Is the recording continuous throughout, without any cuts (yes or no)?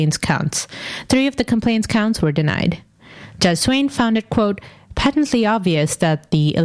yes